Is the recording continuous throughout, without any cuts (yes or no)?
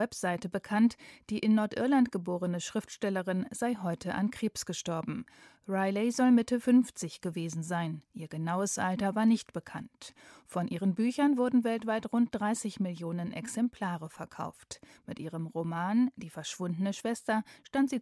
yes